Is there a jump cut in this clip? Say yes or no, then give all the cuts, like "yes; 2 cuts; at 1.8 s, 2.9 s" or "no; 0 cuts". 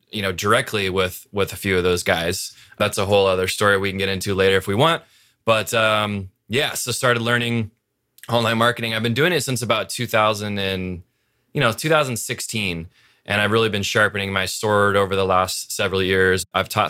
no; 0 cuts